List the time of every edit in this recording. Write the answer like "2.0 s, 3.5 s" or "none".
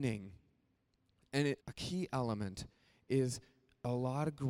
1.6 s